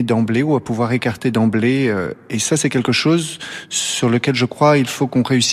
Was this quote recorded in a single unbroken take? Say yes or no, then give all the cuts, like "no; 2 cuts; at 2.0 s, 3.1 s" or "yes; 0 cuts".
yes; 0 cuts